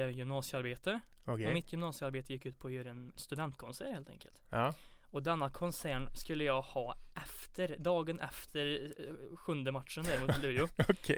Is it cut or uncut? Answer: uncut